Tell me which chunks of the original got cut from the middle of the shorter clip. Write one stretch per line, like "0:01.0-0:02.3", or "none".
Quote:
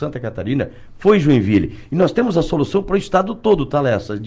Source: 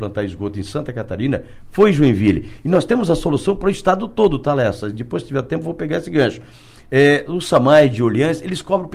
none

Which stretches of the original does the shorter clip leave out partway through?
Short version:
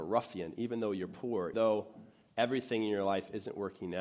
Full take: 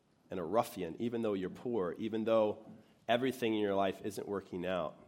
0:02.0-0:02.2

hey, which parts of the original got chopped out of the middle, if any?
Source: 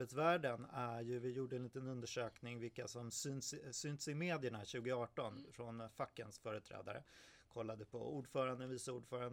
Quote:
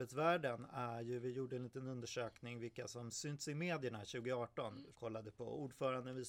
0:03.1-0:03.7
0:05.5-0:07.5

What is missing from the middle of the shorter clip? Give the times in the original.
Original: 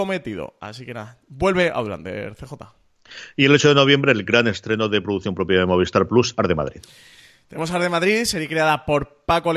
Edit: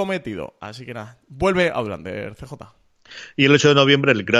none

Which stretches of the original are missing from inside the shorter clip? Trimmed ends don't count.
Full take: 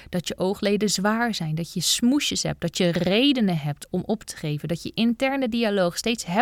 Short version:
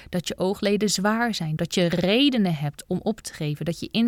0:01.6-0:02.6

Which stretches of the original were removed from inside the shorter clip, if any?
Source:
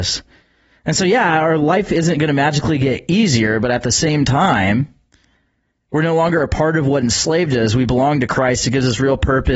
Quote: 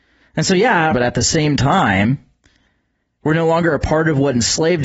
0:01.4-0:03.6

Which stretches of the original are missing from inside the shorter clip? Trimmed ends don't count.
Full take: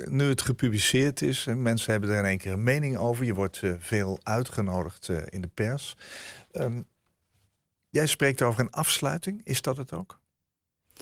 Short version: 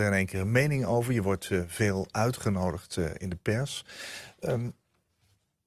none

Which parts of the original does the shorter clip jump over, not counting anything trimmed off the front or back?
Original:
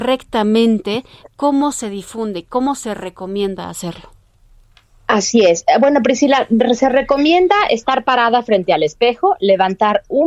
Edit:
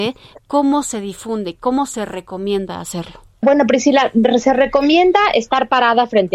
0:04.3-0:05.8

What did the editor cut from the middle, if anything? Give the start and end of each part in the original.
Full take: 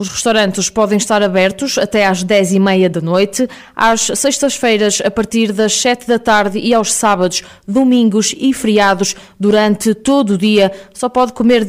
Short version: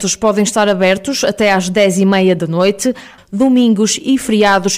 0:03.7-0:07.5

